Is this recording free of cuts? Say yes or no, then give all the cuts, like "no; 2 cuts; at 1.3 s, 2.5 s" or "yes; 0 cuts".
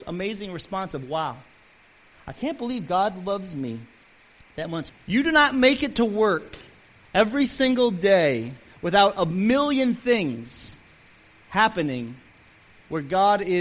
no; 1 cut; at 4.9 s